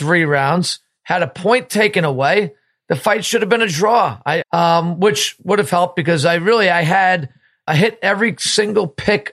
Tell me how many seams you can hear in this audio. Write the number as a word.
two